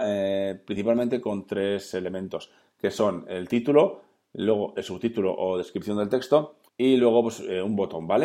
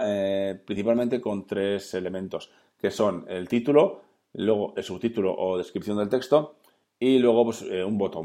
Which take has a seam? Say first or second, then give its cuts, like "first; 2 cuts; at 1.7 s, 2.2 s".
first; 1 cut; at 6.7 s